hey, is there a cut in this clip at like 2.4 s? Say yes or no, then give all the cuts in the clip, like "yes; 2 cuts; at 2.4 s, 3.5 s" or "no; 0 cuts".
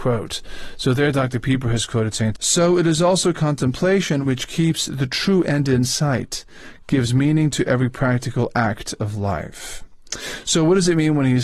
yes; 1 cut; at 2.4 s